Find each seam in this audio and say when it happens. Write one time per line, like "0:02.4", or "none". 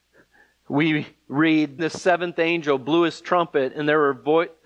0:01.8